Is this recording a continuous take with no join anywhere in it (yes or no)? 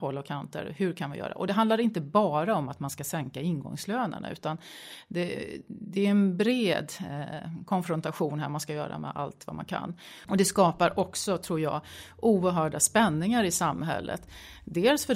no